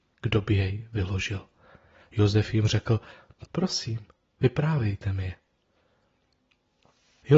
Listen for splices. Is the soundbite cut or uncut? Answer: cut